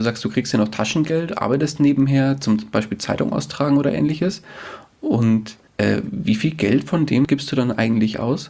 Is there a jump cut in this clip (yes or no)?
yes